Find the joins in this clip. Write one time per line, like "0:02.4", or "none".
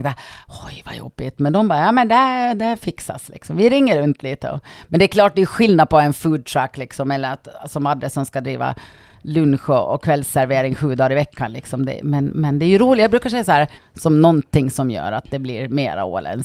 0:13.8